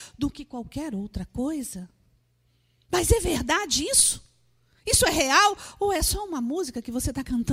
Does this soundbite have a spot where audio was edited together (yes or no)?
no